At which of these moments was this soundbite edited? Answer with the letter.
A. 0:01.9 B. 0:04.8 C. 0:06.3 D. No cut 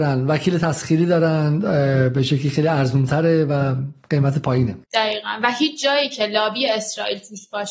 B